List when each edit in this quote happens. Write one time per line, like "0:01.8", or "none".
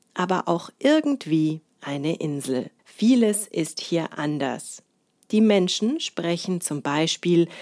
0:02.8